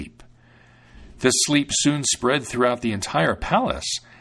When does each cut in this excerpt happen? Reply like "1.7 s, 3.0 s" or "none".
none